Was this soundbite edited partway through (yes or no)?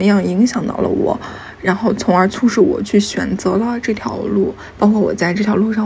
no